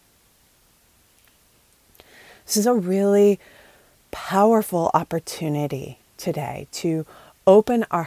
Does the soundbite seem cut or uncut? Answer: uncut